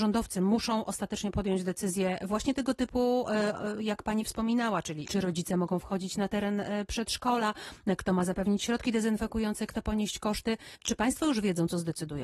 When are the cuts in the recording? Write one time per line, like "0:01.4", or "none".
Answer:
none